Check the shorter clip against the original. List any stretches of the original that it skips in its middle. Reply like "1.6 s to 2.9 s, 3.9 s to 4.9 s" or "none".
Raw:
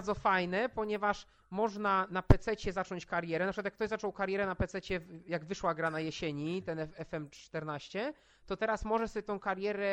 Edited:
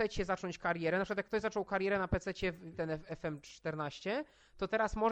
5.2 s to 6.6 s